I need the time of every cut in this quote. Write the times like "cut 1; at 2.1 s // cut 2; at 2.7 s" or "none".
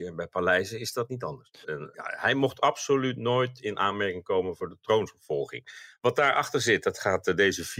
cut 1; at 1.6 s

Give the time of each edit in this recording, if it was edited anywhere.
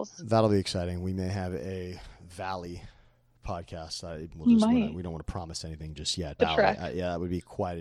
cut 1; at 4.3 s // cut 2; at 6.4 s

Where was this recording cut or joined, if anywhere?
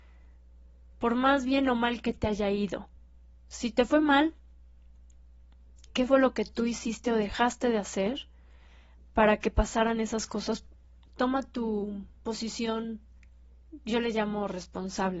cut 1; at 5.9 s

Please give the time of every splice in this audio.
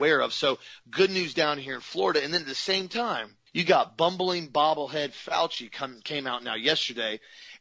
cut 1; at 3.5 s

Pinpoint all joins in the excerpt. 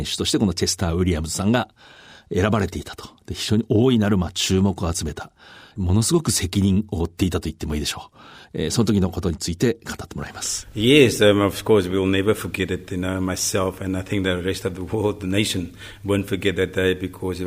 none

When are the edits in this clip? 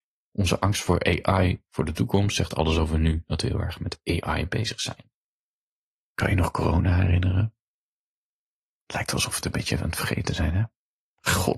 none

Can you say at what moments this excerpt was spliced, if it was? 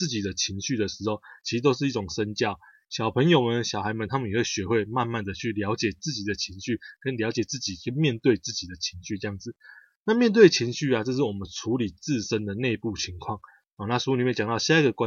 none

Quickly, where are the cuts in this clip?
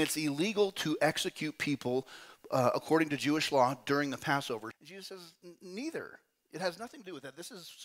cut 1; at 4.7 s

